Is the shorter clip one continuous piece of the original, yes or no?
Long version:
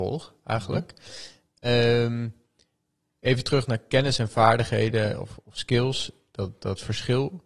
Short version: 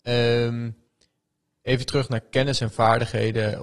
yes